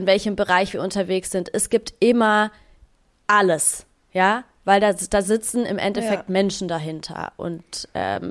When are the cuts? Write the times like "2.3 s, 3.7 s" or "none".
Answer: none